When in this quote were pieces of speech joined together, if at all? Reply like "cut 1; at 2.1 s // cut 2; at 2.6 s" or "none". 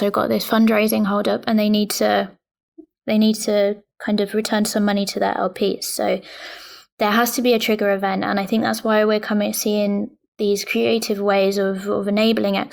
none